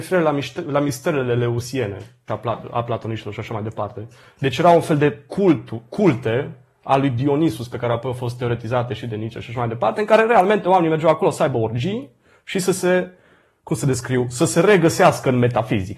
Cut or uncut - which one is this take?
cut